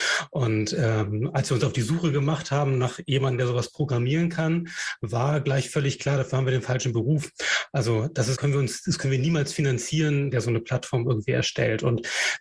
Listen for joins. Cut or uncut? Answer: cut